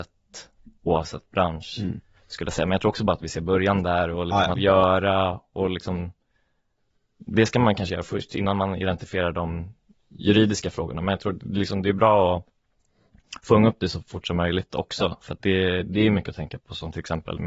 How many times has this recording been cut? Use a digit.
1